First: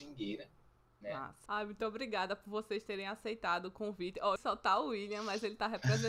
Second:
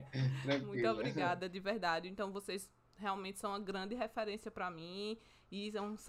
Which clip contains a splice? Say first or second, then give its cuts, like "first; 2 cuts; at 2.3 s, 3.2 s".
first; 2 cuts; at 1.5 s, 4.4 s